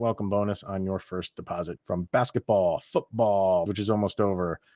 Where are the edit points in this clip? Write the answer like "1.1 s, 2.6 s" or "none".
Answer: 1.8 s, 3.7 s